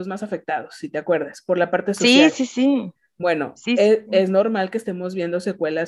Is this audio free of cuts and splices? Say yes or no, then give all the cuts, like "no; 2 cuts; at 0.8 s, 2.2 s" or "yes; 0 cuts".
yes; 0 cuts